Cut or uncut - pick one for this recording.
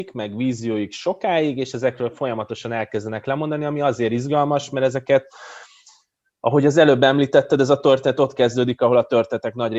uncut